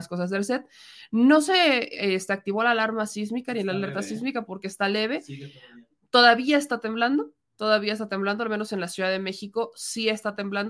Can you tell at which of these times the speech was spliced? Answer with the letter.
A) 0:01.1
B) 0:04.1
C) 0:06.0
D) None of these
D